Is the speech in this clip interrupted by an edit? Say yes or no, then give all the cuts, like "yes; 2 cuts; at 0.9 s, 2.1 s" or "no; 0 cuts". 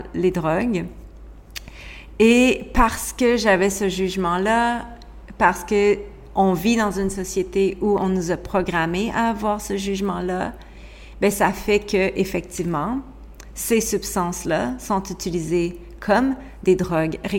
no; 0 cuts